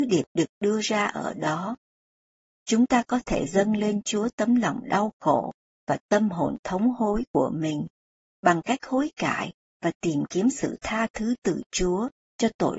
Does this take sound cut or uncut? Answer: uncut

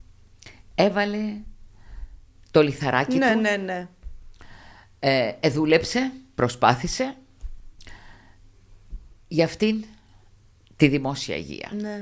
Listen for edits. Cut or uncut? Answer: uncut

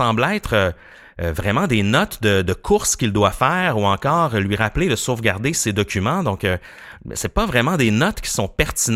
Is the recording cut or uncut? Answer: uncut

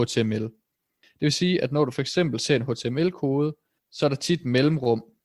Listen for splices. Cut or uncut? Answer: uncut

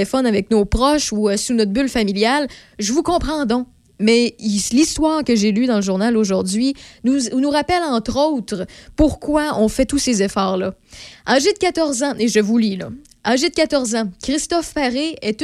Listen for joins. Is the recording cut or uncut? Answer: uncut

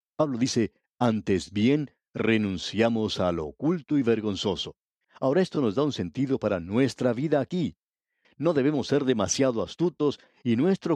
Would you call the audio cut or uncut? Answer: cut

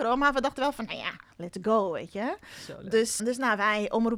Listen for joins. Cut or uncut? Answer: cut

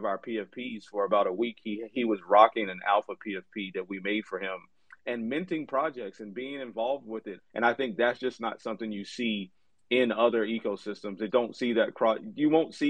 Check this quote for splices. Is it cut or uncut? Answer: cut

